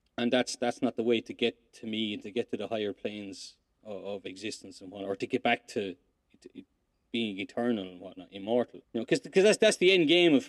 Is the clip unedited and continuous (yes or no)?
no